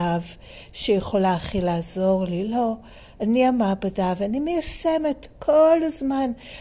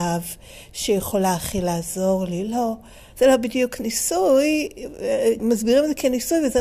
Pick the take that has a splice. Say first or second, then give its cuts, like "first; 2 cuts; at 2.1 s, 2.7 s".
second; 2 cuts; at 3.1 s, 5.4 s